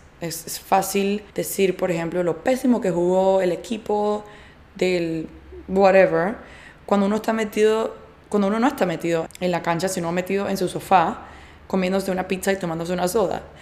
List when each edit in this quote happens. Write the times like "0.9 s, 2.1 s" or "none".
1.3 s, 9.3 s